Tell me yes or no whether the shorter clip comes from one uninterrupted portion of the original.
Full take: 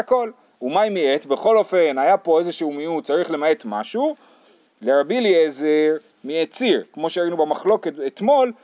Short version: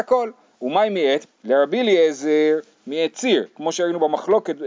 no